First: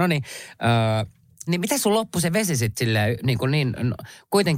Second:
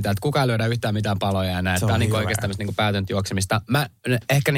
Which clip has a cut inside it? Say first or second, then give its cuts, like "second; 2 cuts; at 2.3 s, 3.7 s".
first; 1 cut; at 1.5 s